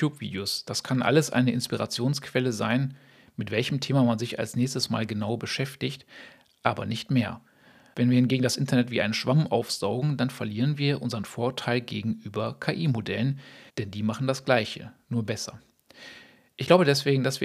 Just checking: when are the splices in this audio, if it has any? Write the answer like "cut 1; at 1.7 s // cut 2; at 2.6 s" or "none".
cut 1; at 13.7 s // cut 2; at 15.0 s